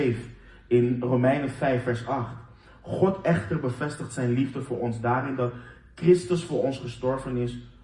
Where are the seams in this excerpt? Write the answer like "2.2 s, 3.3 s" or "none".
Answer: none